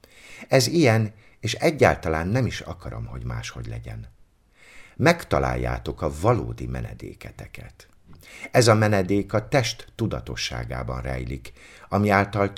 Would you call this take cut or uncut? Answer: uncut